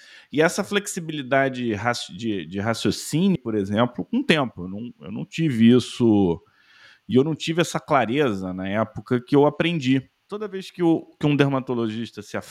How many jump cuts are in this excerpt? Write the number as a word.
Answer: two